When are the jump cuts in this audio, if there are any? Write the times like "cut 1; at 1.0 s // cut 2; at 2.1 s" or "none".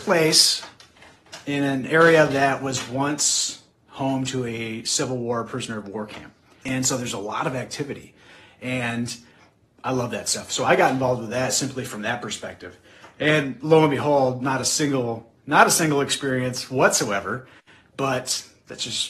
cut 1; at 6.6 s